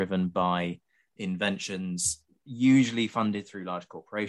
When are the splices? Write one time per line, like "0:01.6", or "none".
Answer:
0:01.2